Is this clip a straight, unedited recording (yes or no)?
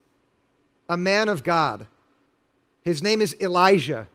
yes